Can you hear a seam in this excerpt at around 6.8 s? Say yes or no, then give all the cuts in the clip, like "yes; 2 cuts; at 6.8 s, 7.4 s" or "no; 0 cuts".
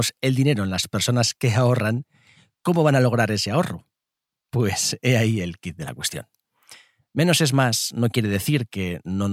no; 0 cuts